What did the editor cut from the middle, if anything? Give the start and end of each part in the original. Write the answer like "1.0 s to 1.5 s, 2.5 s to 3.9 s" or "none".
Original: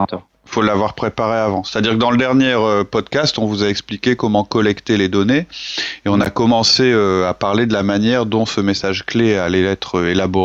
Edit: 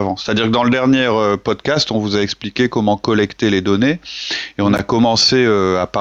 none